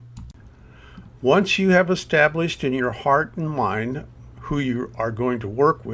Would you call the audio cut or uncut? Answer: cut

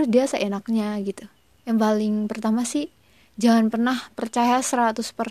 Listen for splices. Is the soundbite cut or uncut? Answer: cut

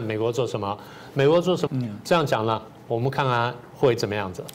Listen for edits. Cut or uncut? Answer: cut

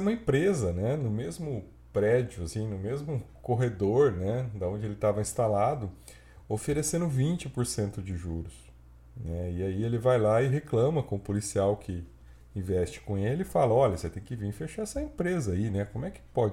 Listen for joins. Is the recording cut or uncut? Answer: uncut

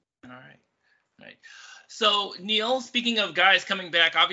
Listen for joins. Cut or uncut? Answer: uncut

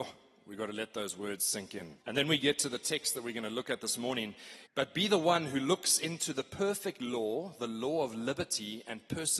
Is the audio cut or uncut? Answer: cut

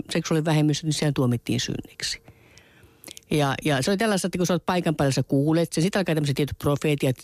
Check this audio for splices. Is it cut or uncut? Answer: uncut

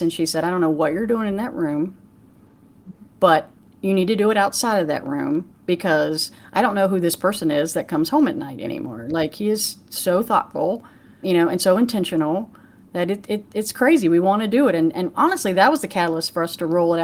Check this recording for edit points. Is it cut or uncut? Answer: cut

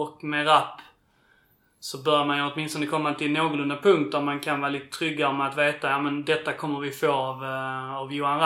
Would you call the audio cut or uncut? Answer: uncut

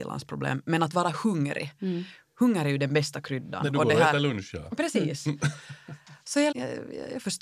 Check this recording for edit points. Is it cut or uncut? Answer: cut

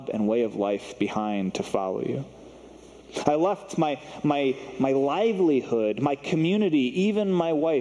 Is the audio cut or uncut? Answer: uncut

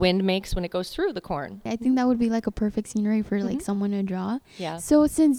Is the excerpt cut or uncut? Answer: cut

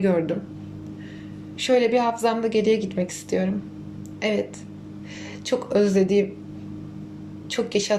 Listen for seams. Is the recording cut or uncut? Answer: uncut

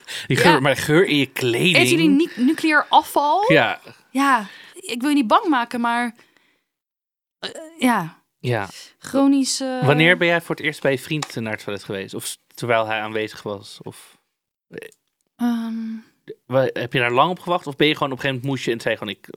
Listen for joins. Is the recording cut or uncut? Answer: cut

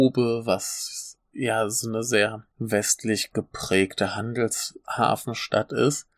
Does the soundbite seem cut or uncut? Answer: cut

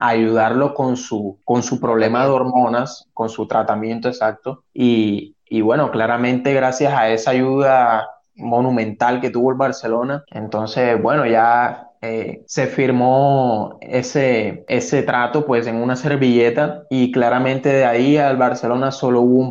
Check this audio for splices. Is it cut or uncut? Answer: cut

